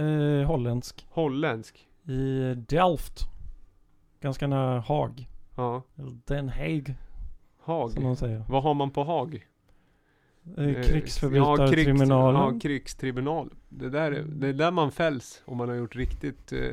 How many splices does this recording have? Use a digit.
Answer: 0